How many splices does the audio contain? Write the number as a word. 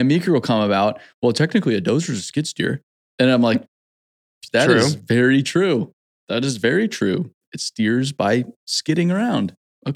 one